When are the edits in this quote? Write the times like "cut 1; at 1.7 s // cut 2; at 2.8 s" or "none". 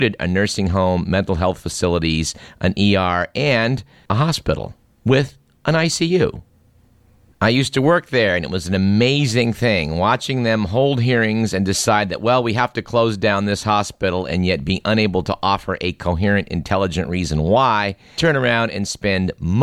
cut 1; at 7.3 s // cut 2; at 18.2 s